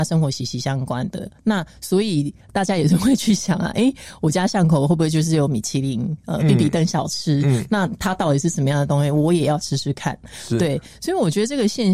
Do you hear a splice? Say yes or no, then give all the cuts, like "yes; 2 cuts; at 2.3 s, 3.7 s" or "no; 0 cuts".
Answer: no; 0 cuts